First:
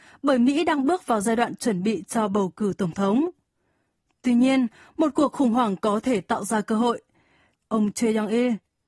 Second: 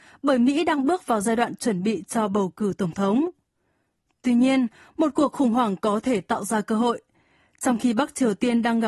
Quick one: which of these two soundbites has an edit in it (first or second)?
first